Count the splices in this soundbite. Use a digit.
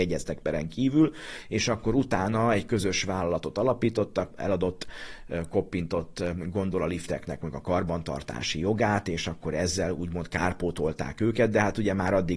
1